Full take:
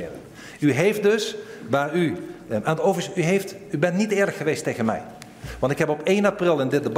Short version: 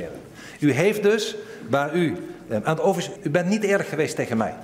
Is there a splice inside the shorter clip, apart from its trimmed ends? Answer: yes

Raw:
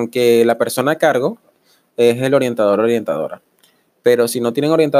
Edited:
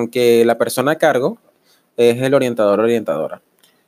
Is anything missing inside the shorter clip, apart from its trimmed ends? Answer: no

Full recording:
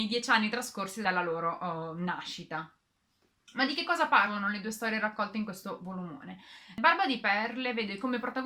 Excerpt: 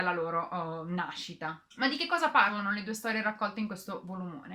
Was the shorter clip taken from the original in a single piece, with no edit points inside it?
no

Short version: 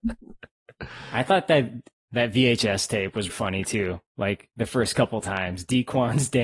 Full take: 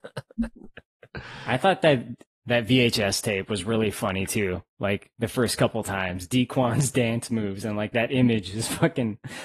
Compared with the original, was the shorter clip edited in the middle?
yes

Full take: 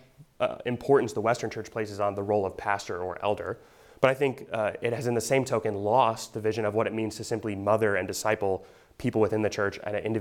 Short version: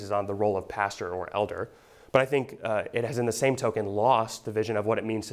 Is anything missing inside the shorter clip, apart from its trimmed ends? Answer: no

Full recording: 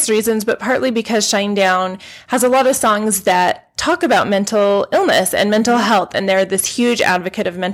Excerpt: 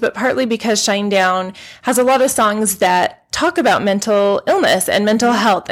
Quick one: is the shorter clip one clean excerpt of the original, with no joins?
yes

